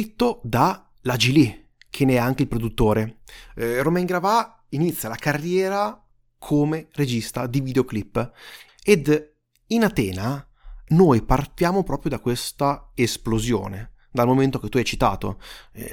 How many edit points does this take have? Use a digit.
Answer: 2